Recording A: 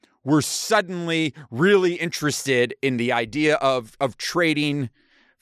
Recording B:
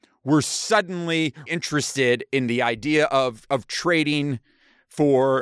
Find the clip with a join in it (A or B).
B